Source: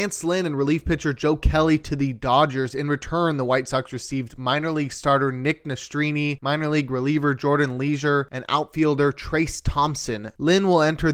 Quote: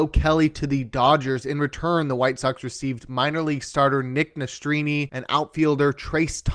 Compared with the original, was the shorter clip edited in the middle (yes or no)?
yes